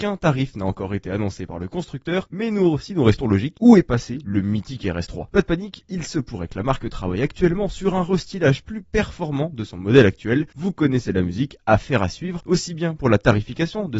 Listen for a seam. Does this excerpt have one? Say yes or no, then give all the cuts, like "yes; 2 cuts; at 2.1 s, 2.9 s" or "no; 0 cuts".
yes; 1 cut; at 3.5 s